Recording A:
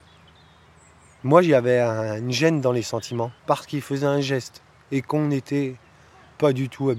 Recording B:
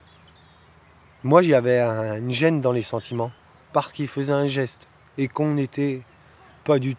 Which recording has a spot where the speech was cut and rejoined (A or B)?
A